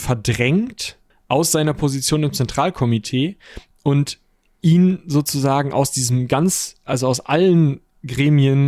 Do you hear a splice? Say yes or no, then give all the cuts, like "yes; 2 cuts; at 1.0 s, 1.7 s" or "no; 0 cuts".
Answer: no; 0 cuts